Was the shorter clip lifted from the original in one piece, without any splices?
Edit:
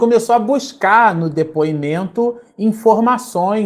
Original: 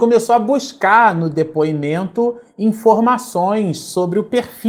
yes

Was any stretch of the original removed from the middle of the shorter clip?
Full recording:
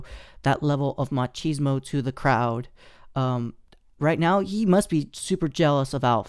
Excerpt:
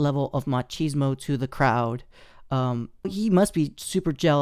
yes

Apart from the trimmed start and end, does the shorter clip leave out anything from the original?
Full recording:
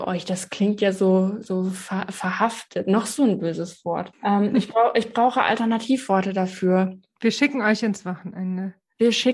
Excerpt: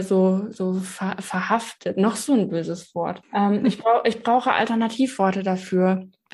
no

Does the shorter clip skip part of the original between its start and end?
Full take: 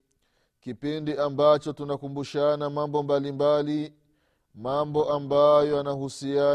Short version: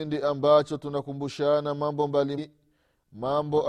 yes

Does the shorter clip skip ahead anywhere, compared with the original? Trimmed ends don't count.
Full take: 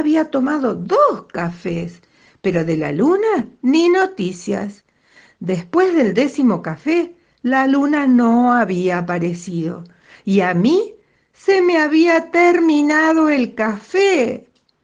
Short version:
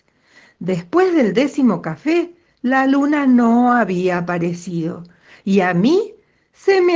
no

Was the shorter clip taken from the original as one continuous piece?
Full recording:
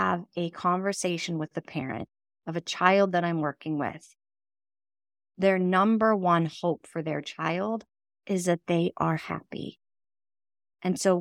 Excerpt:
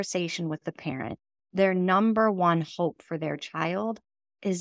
no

